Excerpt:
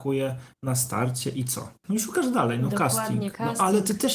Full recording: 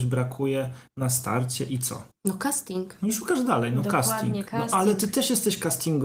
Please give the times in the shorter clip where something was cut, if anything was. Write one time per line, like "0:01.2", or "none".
0:01.8